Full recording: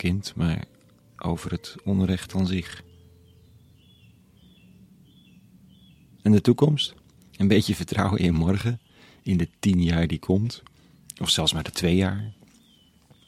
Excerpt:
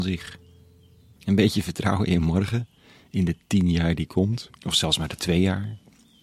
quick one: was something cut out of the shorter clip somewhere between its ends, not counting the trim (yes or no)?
yes